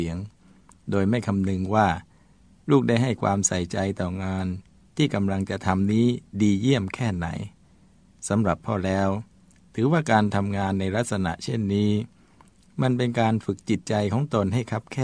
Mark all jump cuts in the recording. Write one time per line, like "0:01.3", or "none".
none